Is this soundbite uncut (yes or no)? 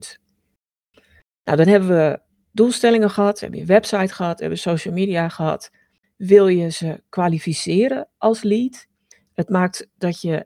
no